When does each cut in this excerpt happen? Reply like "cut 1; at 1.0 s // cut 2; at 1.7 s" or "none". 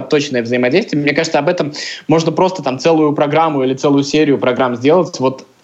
none